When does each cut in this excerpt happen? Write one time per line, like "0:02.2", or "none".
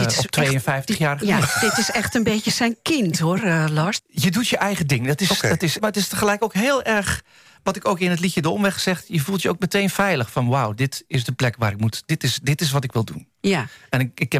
0:04.0
0:05.8